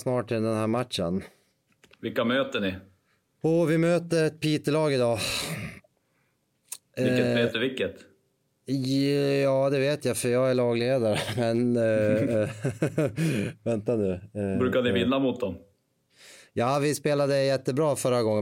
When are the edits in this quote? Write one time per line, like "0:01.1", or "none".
none